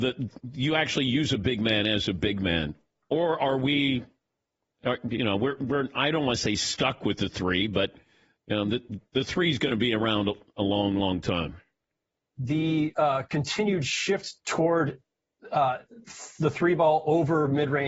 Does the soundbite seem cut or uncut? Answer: cut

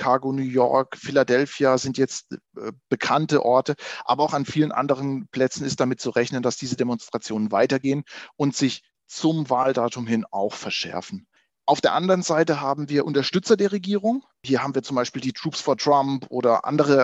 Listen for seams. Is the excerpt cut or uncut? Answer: uncut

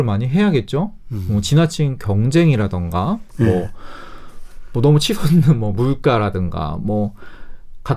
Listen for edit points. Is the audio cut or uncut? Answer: uncut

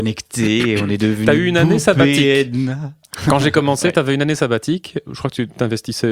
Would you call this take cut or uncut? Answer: uncut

